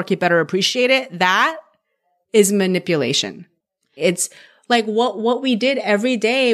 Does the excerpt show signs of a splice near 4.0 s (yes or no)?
yes